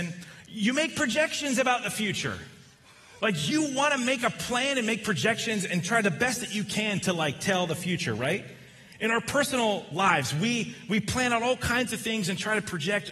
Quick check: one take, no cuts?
yes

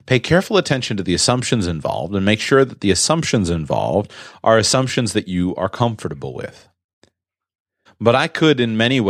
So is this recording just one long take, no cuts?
no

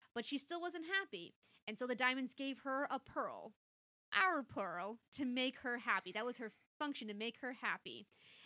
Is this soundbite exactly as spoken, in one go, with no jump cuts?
yes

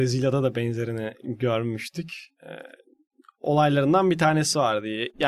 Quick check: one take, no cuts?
yes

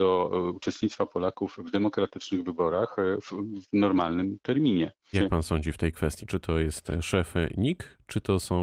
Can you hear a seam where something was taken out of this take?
yes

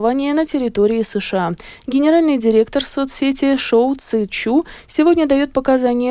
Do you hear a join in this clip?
no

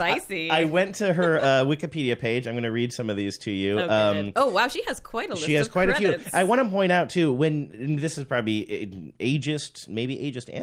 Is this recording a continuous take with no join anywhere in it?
yes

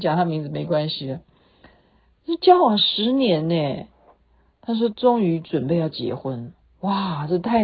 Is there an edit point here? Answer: no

